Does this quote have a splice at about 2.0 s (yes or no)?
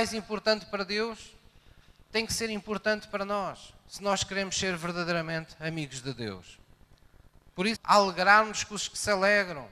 no